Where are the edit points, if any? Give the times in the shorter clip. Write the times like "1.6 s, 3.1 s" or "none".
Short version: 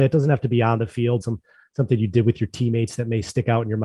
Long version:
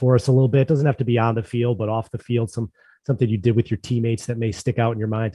1.2 s